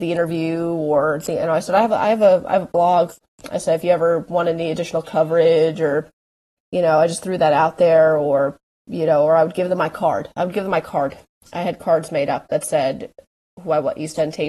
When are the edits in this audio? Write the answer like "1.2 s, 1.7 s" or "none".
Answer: none